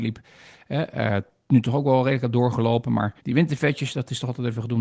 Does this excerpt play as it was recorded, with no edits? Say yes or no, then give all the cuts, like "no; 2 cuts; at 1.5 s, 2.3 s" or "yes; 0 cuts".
no; 1 cut; at 3.2 s